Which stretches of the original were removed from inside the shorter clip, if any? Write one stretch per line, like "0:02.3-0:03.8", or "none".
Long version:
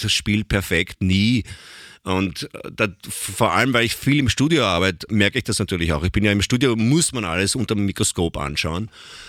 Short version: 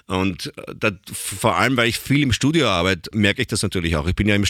none